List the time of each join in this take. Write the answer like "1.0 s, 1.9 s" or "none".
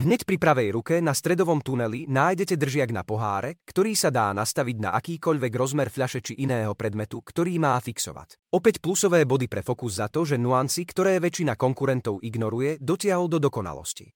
8.4 s